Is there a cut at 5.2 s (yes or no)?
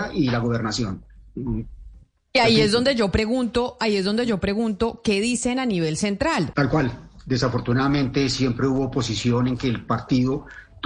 no